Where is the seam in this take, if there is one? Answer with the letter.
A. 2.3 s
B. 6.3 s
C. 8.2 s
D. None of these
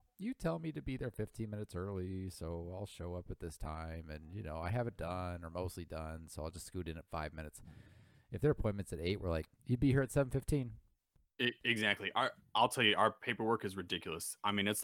D